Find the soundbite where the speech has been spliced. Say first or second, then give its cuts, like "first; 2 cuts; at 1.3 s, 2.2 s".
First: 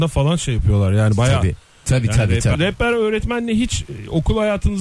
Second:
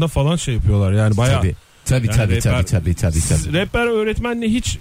first; 1 cut; at 2.5 s